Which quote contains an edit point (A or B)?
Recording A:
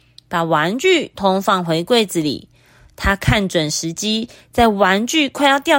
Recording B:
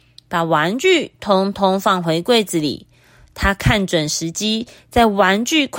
A